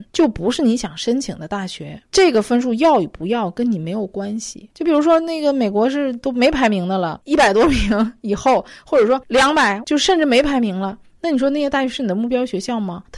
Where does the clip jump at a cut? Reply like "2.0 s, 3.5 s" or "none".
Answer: 9.8 s

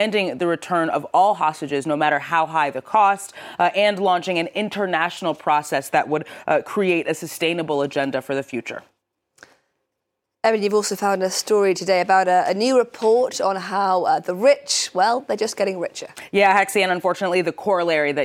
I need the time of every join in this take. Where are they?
none

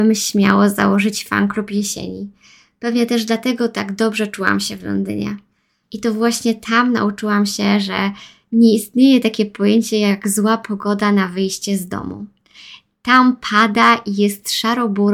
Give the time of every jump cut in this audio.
5.8 s

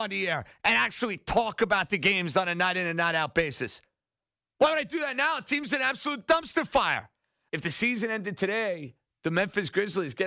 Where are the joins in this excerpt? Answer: 7.5 s

